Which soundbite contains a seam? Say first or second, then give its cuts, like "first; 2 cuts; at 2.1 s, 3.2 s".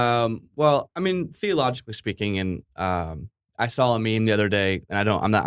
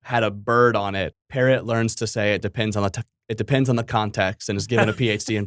second; 1 cut; at 1.1 s